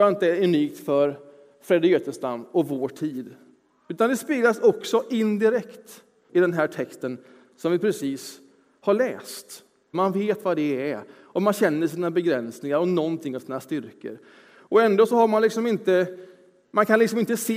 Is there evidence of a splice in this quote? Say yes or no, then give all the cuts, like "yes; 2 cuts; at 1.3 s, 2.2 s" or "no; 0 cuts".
yes; 2 cuts; at 6.3 s, 9.9 s